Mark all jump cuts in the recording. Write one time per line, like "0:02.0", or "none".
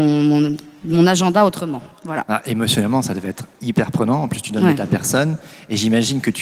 none